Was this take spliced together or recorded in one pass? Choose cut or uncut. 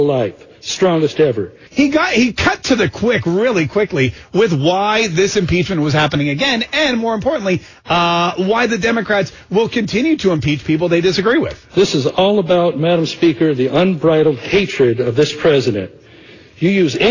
cut